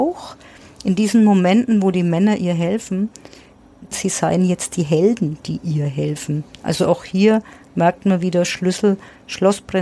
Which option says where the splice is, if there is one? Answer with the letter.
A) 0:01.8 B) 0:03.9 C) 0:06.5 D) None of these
B